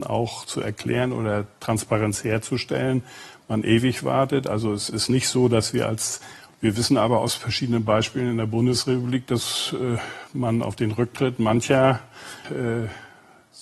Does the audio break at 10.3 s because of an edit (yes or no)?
no